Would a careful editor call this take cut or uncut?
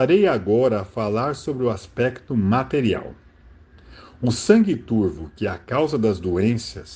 uncut